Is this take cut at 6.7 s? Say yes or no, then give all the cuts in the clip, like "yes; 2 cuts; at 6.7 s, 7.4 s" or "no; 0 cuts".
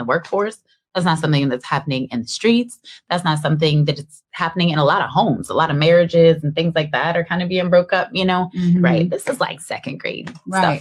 no; 1 cut; at 8.8 s